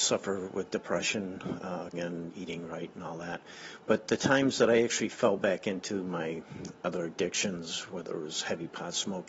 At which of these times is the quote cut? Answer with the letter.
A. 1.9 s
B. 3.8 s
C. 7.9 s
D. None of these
A